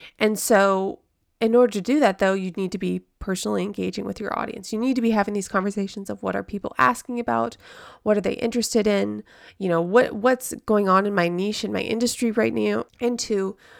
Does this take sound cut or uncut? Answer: cut